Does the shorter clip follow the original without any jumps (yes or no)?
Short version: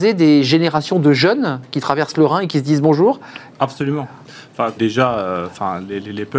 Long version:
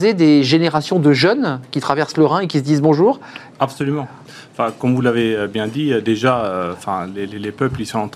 no